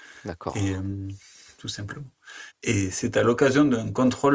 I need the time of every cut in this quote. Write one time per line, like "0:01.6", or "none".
0:02.5